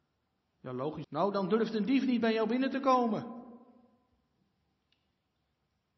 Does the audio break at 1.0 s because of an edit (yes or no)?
yes